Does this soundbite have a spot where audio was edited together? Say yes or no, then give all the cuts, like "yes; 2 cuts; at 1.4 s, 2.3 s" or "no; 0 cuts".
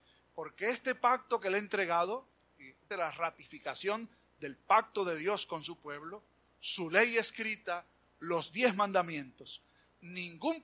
yes; 1 cut; at 2.9 s